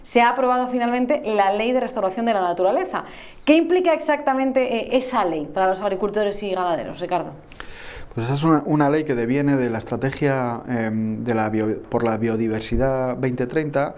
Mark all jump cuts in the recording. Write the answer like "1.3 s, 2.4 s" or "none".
none

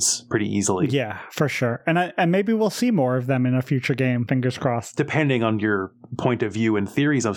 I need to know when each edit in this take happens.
none

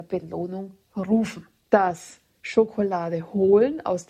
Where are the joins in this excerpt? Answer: 1.7 s

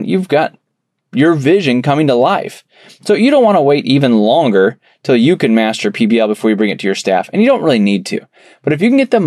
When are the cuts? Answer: none

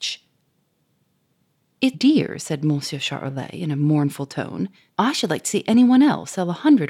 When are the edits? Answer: 1.9 s, 4.9 s

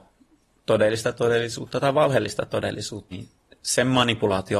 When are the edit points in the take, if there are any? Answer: 3.1 s

